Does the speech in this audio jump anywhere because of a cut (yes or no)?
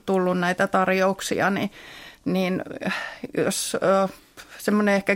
no